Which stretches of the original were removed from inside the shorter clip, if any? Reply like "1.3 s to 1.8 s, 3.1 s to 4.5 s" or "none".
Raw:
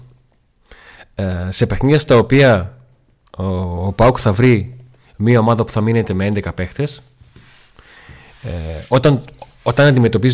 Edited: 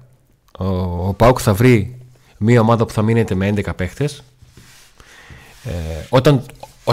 none